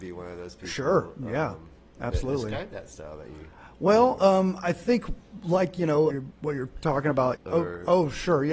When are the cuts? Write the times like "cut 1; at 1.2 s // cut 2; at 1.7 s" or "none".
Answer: cut 1; at 6.1 s // cut 2; at 7.4 s